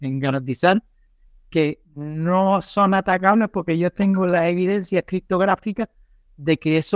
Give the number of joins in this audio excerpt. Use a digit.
0